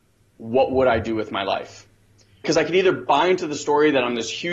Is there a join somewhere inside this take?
yes; 1 cut; at 2.4 s

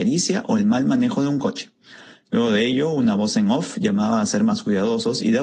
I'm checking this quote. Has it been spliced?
no; 0 cuts

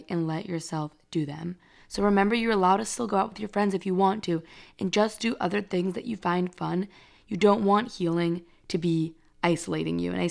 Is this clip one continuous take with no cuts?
yes; 0 cuts

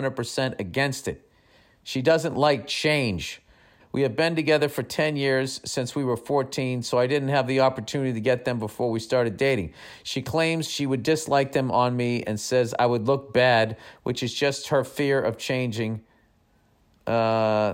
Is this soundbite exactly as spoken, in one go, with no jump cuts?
no; 1 cut; at 3.8 s

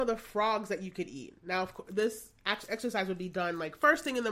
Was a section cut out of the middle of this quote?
no; 0 cuts

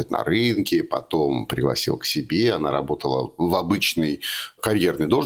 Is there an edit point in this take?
no; 0 cuts

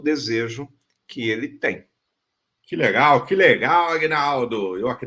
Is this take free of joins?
yes; 0 cuts

